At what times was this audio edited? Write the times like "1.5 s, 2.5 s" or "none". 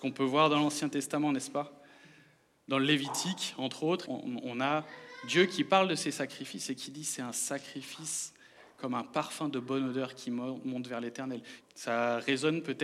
4.0 s, 11.6 s